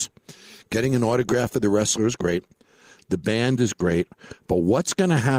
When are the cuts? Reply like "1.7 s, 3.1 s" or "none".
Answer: none